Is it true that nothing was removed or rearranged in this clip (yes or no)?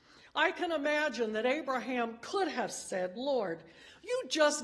yes